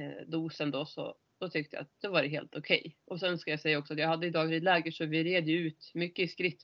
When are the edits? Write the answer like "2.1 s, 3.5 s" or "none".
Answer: none